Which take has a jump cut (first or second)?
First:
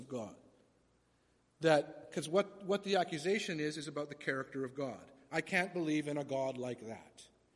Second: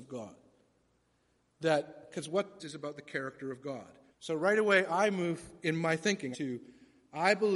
second